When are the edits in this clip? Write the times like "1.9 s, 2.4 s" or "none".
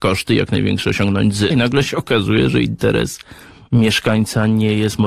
1.5 s

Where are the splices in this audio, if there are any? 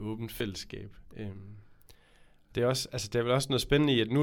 none

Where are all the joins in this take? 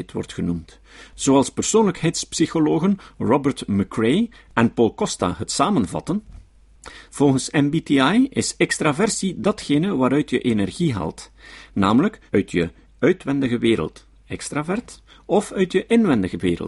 7.1 s, 12.3 s

